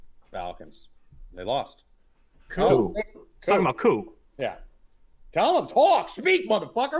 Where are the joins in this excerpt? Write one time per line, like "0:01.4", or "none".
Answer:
none